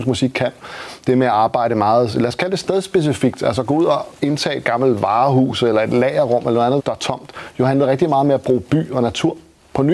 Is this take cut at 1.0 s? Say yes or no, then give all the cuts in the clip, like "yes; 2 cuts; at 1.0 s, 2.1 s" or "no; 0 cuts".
no; 1 cut; at 6.8 s